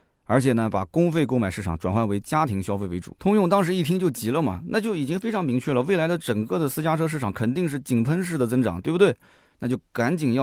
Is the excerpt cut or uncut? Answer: cut